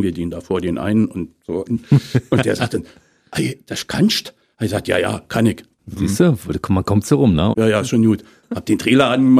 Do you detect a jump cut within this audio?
yes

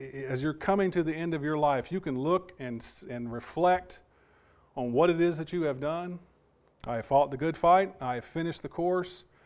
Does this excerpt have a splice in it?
yes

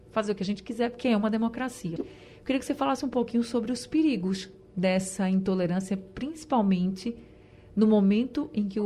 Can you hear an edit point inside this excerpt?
yes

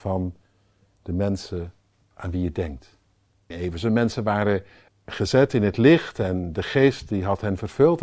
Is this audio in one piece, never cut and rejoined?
no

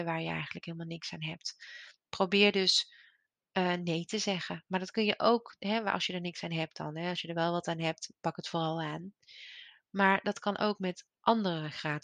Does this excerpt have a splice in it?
no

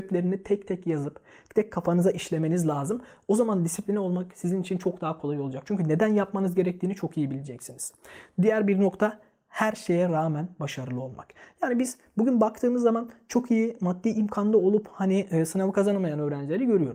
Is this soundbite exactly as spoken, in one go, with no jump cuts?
no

